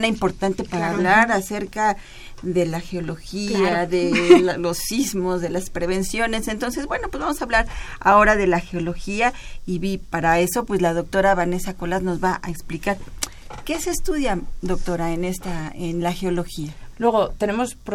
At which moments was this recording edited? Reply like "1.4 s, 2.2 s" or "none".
10.1 s, 16.9 s